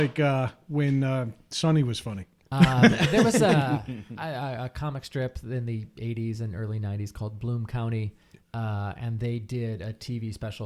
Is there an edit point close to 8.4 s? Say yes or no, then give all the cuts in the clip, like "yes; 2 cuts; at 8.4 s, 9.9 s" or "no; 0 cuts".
no; 1 cut; at 2.4 s